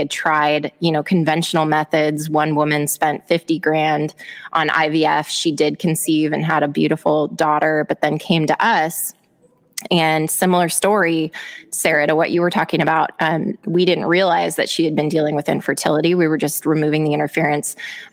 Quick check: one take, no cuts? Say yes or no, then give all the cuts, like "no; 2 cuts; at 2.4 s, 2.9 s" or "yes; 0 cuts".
yes; 0 cuts